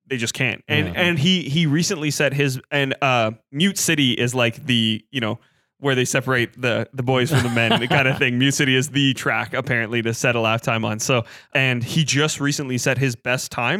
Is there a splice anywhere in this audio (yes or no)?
yes